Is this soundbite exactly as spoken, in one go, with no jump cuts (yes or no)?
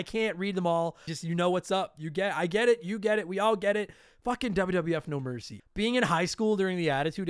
no